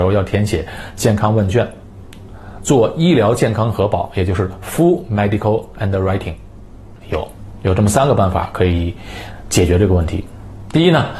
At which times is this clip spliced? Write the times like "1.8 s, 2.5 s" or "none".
7.0 s